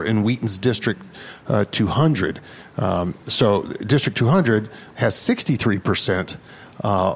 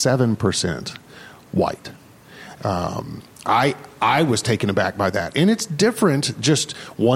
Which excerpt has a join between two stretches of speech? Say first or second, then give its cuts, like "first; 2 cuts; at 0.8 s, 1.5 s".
second; 1 cut; at 2.6 s